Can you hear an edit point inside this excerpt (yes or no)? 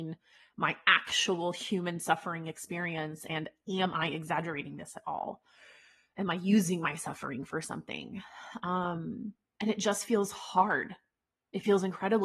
no